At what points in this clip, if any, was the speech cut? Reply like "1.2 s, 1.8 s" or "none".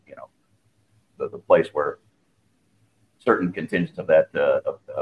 1.1 s